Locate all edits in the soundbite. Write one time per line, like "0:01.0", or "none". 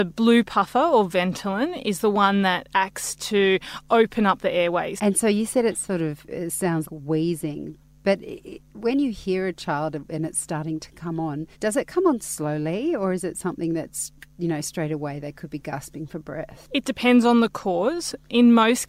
0:05.0
0:06.8
0:11.5